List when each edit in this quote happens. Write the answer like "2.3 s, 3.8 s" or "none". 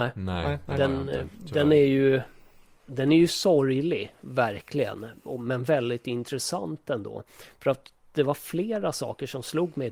none